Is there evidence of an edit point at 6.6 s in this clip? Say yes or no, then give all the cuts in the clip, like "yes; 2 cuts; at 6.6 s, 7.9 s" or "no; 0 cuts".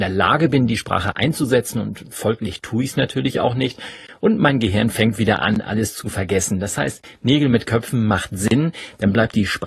no; 0 cuts